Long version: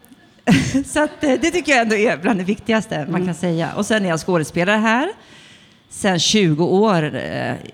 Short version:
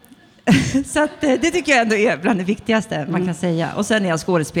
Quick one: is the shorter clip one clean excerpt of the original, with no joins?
yes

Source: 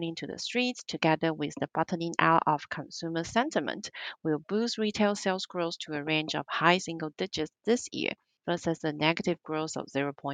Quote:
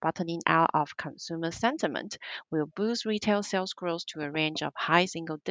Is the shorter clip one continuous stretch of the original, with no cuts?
yes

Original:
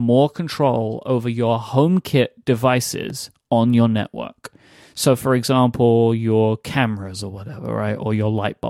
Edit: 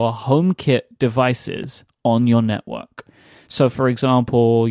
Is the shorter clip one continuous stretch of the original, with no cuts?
yes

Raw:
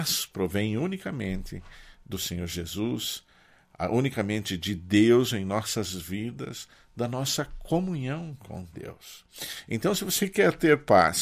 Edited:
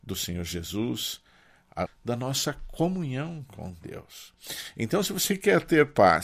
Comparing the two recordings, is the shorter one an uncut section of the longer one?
no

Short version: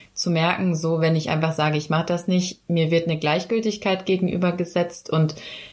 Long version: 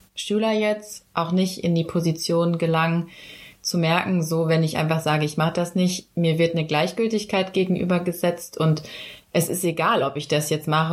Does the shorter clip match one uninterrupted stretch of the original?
yes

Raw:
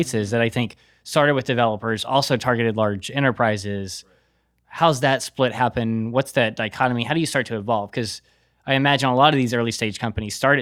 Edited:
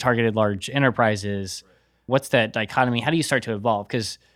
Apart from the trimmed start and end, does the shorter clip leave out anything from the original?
yes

